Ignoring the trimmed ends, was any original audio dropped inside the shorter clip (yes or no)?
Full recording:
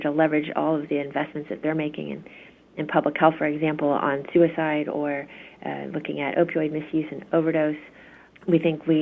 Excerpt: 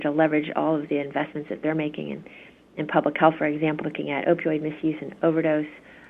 yes